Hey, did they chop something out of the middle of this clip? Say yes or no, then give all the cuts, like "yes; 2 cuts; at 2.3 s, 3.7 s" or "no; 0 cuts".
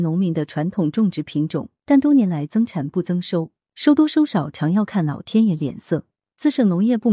yes; 2 cuts; at 1.8 s, 3.6 s